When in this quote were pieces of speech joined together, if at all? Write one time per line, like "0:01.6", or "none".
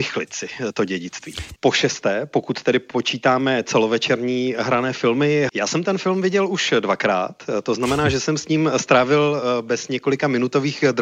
0:01.6
0:05.5